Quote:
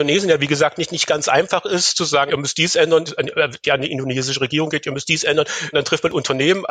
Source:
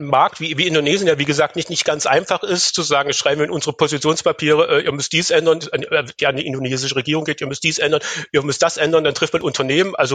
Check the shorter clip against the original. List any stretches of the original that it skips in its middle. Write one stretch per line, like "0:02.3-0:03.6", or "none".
0:03.1-0:04.8
0:08.3-0:09.0